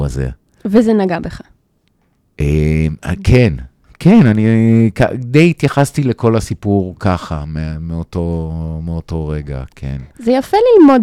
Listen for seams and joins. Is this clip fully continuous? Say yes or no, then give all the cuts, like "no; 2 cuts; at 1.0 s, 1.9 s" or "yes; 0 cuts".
yes; 0 cuts